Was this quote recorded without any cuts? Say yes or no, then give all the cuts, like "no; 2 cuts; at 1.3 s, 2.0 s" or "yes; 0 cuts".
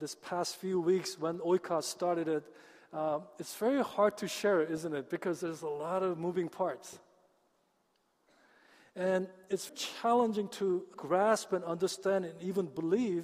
no; 2 cuts; at 9.7 s, 10.9 s